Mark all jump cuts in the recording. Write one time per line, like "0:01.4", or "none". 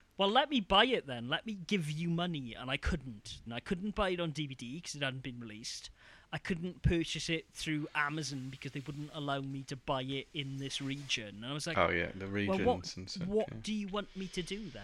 0:03.5